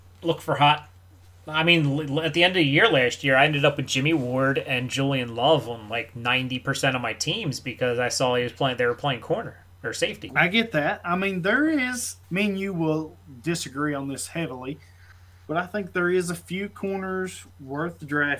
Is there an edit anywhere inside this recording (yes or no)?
yes